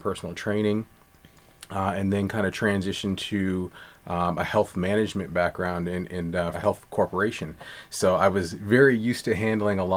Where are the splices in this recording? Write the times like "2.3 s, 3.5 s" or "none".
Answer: 6.5 s